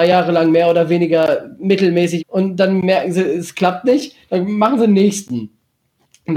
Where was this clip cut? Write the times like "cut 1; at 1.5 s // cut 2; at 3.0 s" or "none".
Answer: cut 1; at 2.2 s

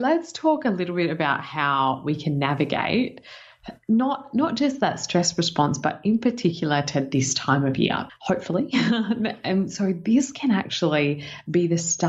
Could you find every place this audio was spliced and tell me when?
cut 1; at 8.1 s

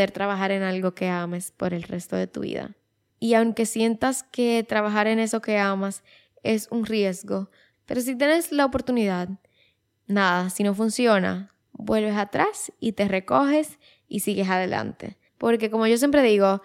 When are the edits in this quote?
cut 1; at 7.7 s // cut 2; at 15.3 s

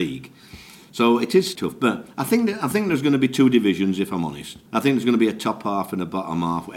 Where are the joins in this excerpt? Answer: cut 1; at 1.6 s // cut 2; at 4.7 s

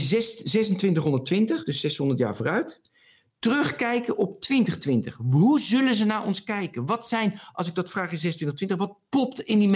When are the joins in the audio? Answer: none

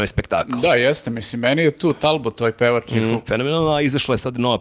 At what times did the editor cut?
cut 1; at 3.3 s

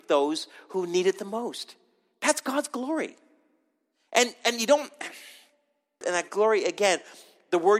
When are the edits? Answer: cut 1; at 6.0 s

